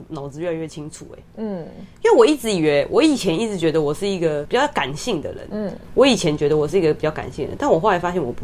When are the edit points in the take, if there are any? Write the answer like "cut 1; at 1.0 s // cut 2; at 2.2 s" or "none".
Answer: none